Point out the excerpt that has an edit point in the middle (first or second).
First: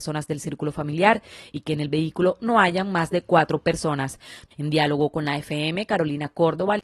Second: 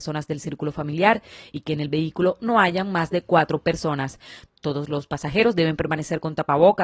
first